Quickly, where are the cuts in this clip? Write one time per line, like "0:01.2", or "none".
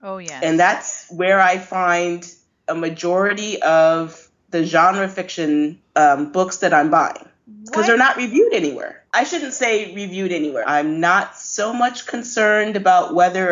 0:09.1
0:10.6